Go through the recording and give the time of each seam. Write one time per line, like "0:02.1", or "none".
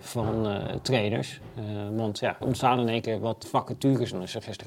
0:02.4
0:03.4